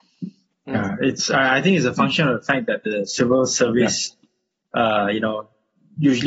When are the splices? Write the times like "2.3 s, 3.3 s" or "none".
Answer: none